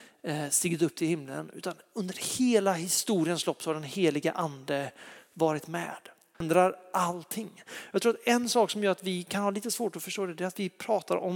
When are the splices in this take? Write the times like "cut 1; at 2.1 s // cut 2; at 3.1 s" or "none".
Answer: cut 1; at 6.3 s